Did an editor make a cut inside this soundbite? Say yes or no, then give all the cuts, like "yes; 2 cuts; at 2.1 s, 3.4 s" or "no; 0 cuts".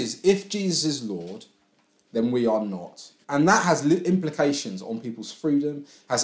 yes; 1 cut; at 3.2 s